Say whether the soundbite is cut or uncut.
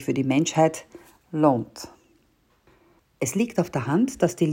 cut